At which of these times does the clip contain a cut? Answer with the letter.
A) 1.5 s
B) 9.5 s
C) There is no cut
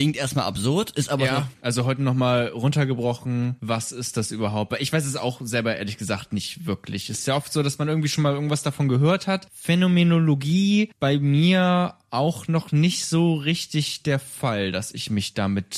A